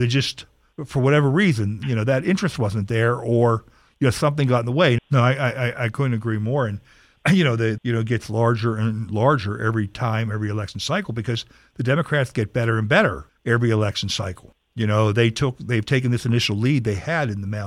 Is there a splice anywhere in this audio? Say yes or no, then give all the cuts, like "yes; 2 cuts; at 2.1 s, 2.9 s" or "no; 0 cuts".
yes; 2 cuts; at 5.0 s, 7.8 s